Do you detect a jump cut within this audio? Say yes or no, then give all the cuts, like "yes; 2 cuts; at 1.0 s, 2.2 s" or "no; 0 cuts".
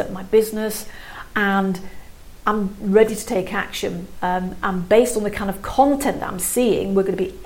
yes; 1 cut; at 4.2 s